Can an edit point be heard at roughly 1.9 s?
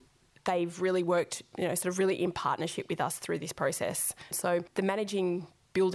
no; 1 cut; at 4.3 s

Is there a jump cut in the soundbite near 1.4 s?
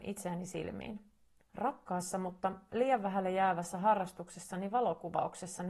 yes; 1 cut; at 1.4 s

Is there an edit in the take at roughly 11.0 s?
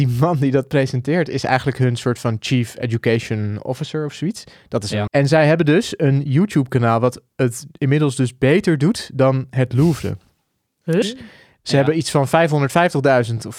yes; 2 cuts; at 5.1 s, 11.0 s

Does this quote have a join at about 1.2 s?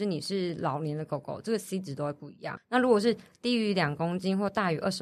no; 1 cut; at 2.6 s

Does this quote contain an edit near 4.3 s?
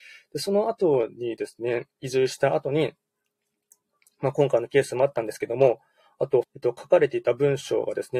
no; 2 cuts; at 1.9 s, 6.4 s

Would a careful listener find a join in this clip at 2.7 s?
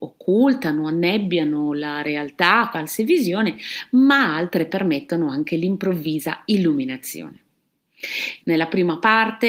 yes; 2 cuts; at 2.7 s, 8.4 s

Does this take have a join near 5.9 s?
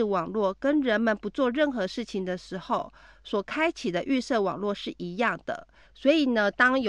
yes; 1 cut; at 5.9 s

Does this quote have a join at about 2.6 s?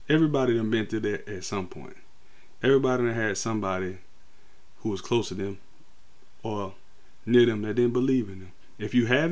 no; 0 cuts

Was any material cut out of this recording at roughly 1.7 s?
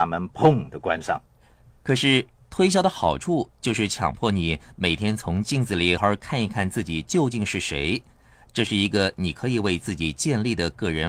no; 1 cut; at 6.0 s

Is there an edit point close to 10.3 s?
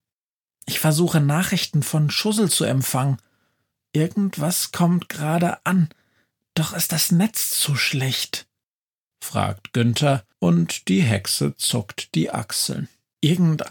yes; 2 cuts; at 9.1 s, 10.3 s

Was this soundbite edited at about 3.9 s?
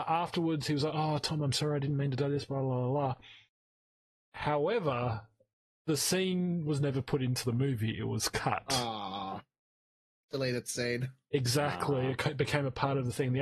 no; 1 cut; at 1.5 s

